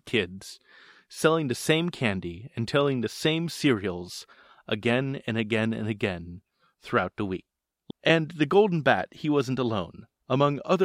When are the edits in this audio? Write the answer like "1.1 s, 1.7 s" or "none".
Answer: 7.9 s